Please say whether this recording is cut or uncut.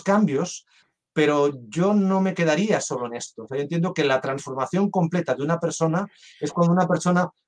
uncut